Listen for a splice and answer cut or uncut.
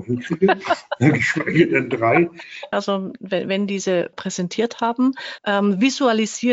cut